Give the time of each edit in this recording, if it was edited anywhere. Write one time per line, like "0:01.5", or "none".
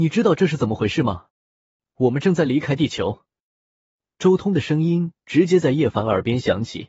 0:01.3